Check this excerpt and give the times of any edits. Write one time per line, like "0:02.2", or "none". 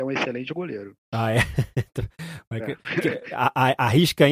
0:01.0

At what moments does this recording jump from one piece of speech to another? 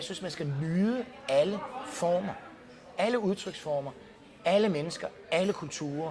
none

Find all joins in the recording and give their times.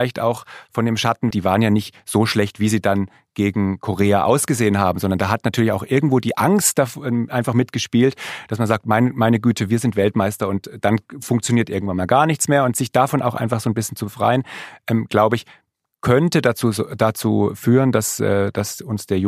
0:01.3

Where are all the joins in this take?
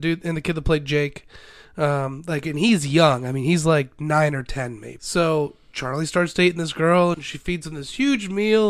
0:05.0
0:07.1

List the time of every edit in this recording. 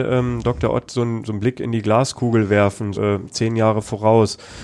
0:02.9

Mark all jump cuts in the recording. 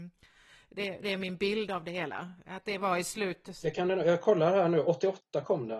none

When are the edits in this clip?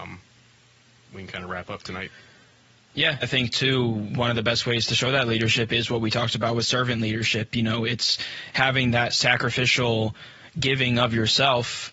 0:03.2

